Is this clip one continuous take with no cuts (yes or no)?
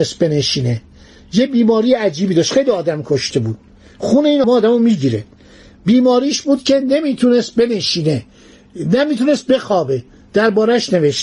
no